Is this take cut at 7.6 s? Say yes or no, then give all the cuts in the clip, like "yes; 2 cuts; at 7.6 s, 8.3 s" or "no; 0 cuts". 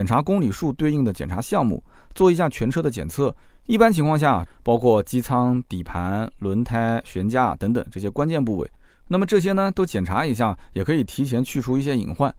no; 1 cut; at 4.5 s